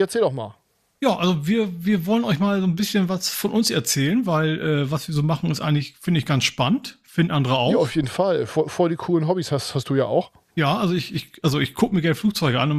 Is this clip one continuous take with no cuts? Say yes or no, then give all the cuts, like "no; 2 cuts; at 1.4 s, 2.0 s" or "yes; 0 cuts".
yes; 0 cuts